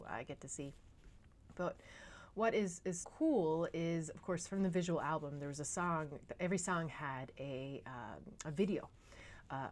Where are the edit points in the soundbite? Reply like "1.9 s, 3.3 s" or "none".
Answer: 3.0 s

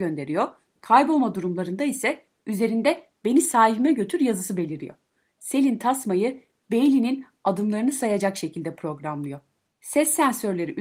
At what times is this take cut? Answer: 9.7 s

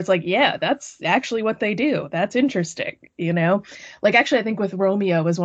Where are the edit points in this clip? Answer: none

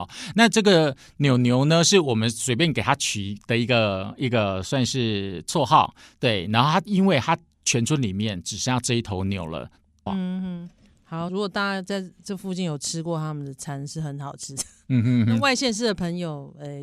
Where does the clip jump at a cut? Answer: 10.1 s, 11.3 s

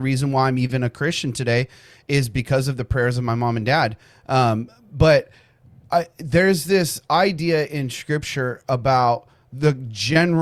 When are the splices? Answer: none

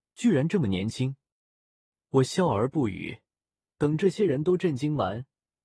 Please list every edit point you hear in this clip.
3.6 s

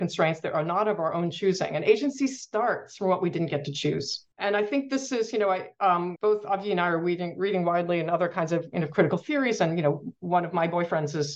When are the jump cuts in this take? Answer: 6.1 s

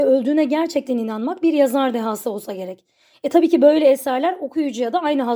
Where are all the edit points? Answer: none

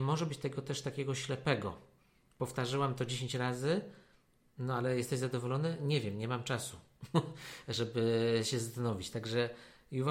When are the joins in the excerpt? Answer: none

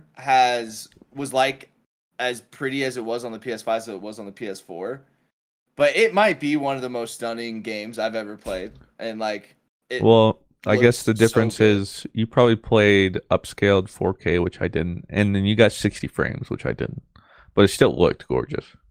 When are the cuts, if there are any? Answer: none

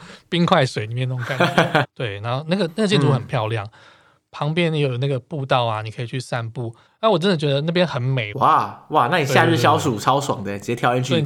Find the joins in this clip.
1.8 s, 6.9 s, 8.3 s

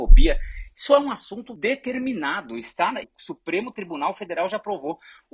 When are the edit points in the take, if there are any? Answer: 3.0 s

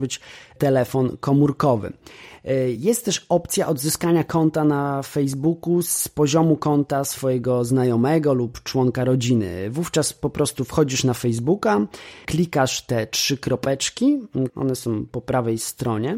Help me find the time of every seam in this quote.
12.2 s, 14.5 s

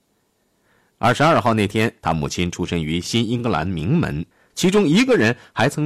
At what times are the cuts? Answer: 2.0 s, 4.5 s

